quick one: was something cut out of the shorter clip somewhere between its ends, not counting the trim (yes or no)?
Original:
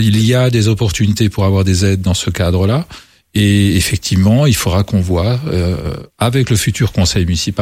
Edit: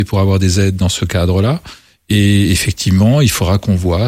no